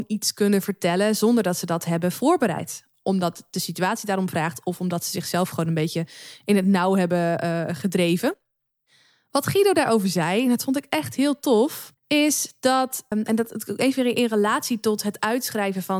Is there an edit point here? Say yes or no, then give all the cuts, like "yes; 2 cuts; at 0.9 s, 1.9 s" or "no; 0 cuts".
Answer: yes; 2 cuts; at 12.0 s, 13.1 s